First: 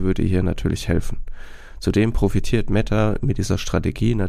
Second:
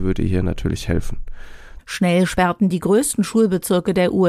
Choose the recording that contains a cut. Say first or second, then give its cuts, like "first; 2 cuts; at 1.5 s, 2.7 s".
second; 1 cut; at 1.8 s